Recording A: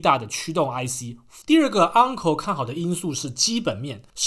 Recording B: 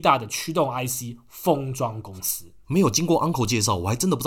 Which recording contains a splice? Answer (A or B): A